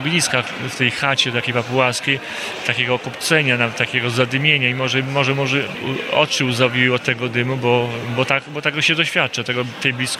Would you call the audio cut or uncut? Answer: uncut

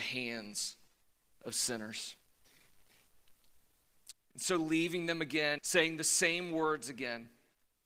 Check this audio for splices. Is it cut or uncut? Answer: cut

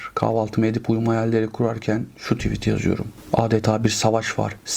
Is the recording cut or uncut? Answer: uncut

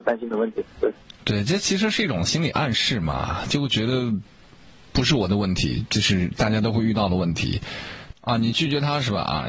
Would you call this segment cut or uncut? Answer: cut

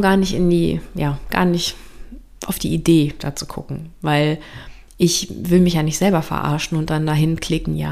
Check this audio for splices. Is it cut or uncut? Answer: cut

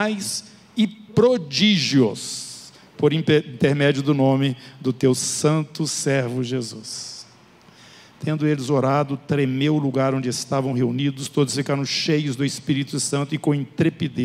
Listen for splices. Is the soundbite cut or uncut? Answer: uncut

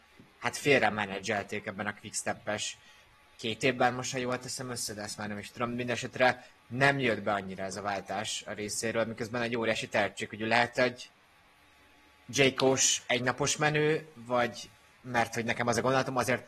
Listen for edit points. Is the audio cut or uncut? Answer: uncut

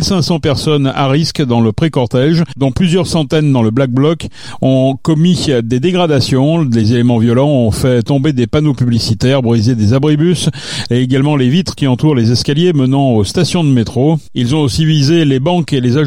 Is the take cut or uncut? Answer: uncut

